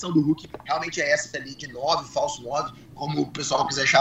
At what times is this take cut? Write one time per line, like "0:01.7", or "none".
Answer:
none